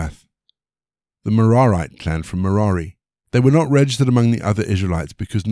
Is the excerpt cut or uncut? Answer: cut